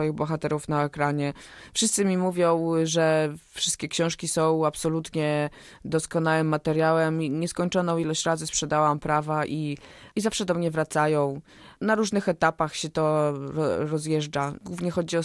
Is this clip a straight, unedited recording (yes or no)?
yes